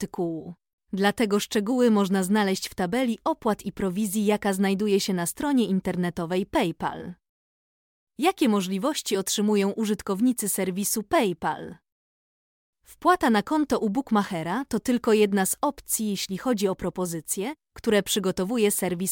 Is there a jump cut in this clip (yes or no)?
no